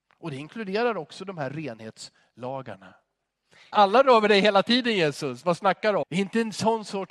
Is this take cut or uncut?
cut